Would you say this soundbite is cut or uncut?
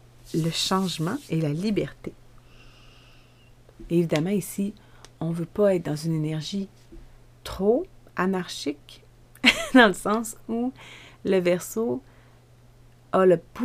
cut